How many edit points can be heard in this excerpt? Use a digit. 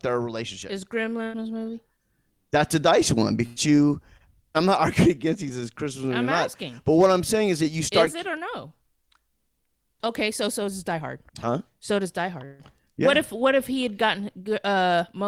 2